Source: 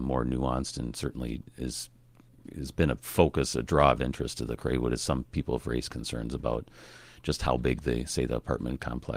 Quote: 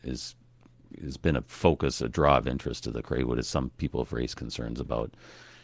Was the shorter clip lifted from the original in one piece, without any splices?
yes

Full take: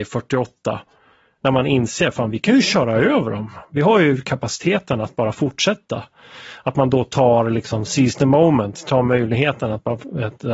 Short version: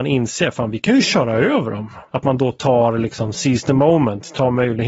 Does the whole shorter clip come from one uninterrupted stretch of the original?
no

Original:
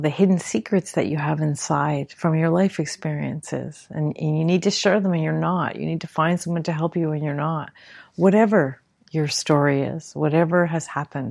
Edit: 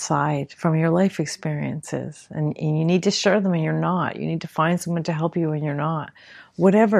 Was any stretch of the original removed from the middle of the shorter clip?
no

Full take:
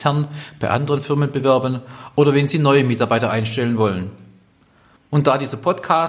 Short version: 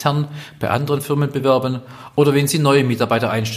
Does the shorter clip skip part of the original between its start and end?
no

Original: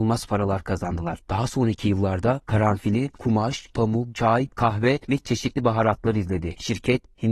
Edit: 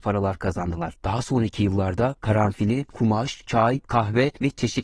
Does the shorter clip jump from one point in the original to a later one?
yes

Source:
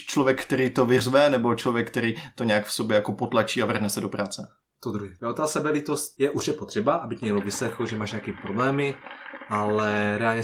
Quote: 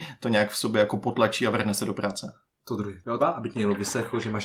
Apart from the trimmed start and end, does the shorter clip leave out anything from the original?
yes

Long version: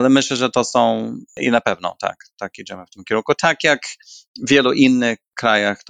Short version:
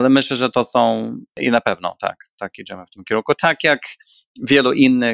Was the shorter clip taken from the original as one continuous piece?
yes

